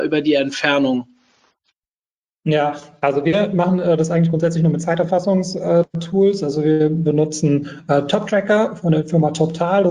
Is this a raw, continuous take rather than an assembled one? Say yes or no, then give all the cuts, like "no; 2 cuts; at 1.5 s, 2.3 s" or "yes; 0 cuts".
yes; 0 cuts